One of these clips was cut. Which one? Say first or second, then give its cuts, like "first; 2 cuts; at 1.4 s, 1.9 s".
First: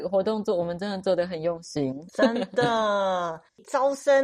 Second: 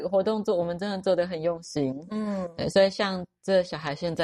first; 1 cut; at 2.1 s